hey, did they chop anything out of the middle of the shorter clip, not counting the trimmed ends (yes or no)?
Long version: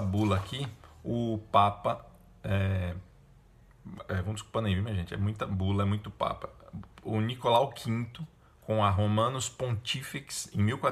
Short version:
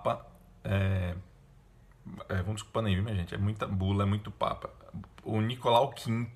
no